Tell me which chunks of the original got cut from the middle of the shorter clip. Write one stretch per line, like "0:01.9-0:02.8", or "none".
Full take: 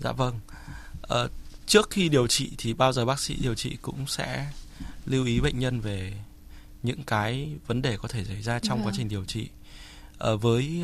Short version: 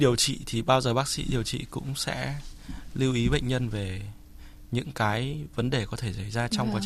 none